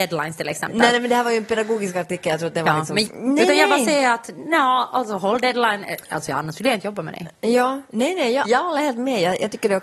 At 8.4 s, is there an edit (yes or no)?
yes